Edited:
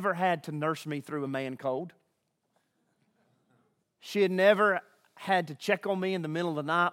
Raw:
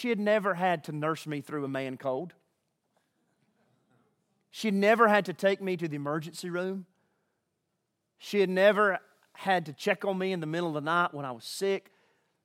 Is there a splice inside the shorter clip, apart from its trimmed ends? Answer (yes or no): yes